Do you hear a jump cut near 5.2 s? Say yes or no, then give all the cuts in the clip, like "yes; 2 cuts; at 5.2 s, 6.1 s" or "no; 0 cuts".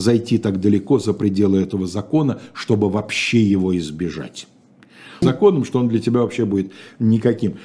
yes; 1 cut; at 5.2 s